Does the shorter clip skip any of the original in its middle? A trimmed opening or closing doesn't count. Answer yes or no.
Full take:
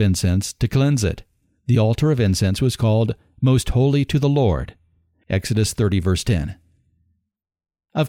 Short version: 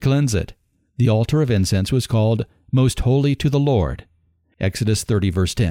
no